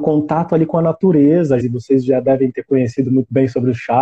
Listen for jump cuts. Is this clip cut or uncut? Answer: cut